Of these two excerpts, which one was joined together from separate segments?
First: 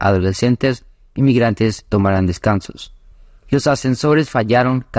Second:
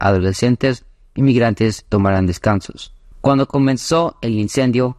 second; 1 cut; at 3.1 s

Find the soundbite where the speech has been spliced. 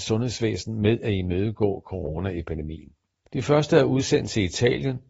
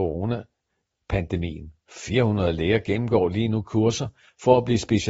first; 1 cut; at 3.2 s

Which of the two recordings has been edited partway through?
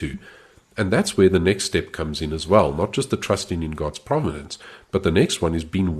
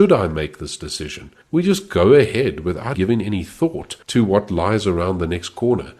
second; 3 cuts; at 1.4 s, 2.9 s, 4.0 s

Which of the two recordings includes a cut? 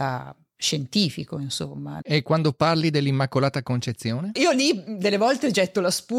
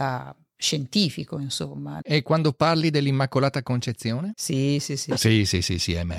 second; 1 cut; at 4.3 s

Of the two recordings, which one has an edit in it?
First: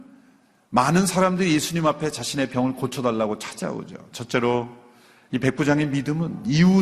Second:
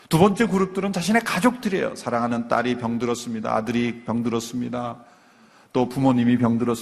first; 1 cut; at 4.1 s

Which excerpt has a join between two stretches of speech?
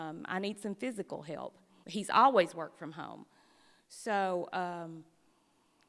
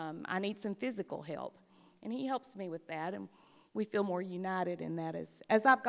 first; 1 cut; at 1.8 s

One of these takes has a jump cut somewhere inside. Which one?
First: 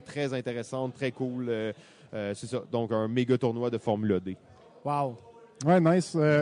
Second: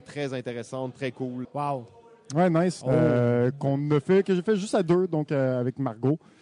second; 2 cuts; at 1.4 s, 2.8 s

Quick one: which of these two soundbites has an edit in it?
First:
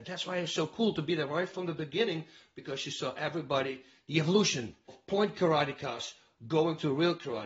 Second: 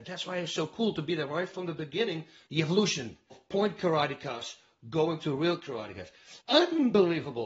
second; 2 cuts; at 2.5 s, 6.4 s

